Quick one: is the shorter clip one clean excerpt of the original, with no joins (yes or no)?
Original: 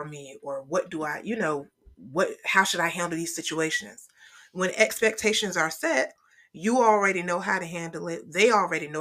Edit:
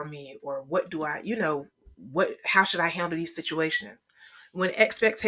yes